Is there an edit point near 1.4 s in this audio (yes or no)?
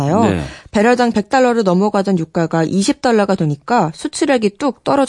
no